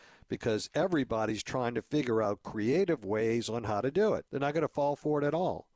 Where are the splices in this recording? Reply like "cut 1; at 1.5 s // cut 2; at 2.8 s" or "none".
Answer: cut 1; at 4.3 s